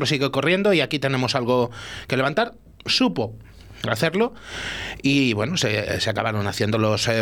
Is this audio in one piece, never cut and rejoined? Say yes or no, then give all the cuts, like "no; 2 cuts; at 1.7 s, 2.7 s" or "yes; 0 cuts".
yes; 0 cuts